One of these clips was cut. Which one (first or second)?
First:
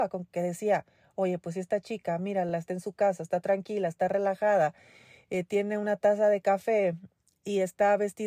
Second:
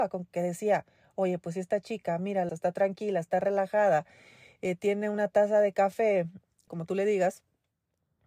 second